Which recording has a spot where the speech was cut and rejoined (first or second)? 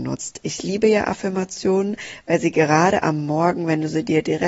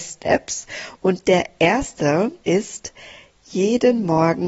second